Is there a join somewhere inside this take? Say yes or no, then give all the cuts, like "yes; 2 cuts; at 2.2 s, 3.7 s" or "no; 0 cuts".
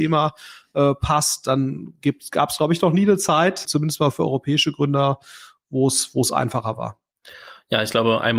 yes; 1 cut; at 3.6 s